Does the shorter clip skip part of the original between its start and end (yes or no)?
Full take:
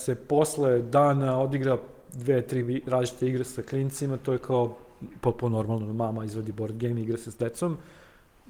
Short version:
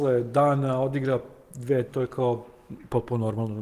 yes